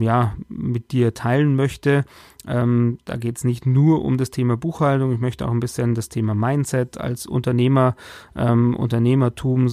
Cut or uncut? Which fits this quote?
uncut